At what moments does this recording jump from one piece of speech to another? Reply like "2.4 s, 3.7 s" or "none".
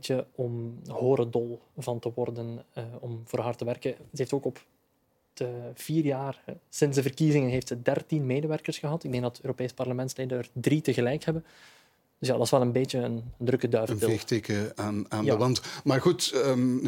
none